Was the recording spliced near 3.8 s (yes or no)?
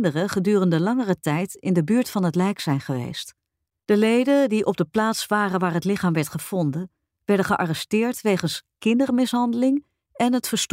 yes